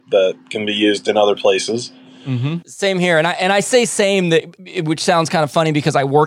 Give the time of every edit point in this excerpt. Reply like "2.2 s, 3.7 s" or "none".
2.6 s, 4.6 s